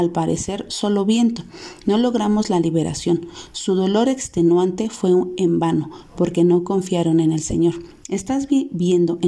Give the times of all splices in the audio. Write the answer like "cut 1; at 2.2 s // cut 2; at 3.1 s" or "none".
none